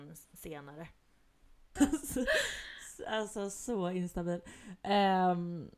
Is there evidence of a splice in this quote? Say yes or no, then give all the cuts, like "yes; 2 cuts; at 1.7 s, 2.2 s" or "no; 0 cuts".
yes; 1 cut; at 1.8 s